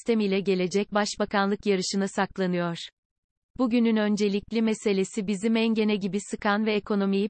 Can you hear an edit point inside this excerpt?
no; 0 cuts

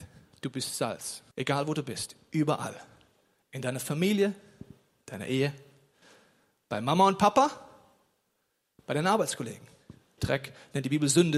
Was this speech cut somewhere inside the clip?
yes; 2 cuts; at 1.3 s, 10.2 s

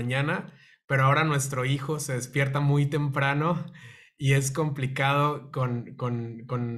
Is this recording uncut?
yes; 0 cuts

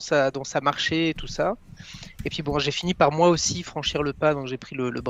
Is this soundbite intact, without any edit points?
yes; 0 cuts

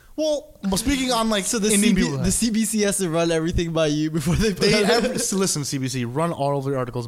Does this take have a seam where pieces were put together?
no; 0 cuts

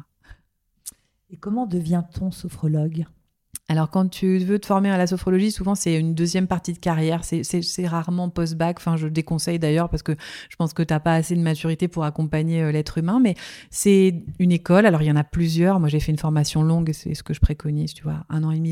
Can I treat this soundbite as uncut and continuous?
yes; 0 cuts

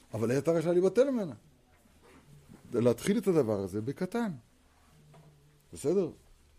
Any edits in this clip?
no; 0 cuts

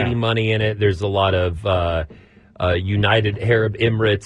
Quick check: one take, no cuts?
yes; 0 cuts

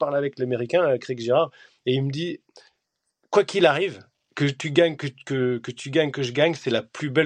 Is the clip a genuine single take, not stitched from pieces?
yes; 0 cuts

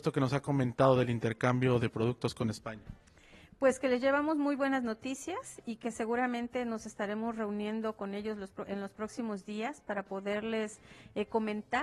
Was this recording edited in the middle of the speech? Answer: no; 0 cuts

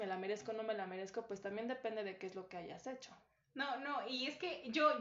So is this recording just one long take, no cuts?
yes; 0 cuts

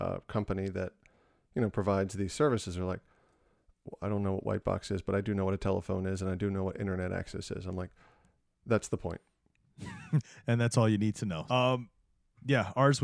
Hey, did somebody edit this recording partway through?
yes; 1 cut; at 11.5 s

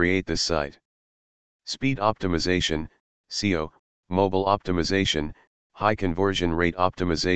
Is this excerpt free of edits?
yes; 0 cuts

